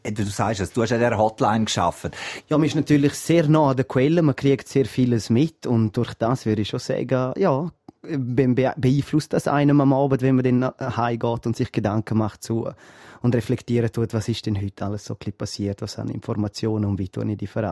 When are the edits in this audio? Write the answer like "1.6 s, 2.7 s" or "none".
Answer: 2.4 s